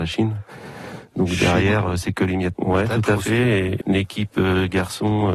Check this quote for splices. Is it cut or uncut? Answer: cut